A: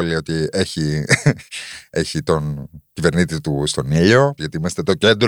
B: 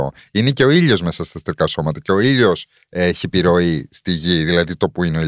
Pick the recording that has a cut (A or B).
A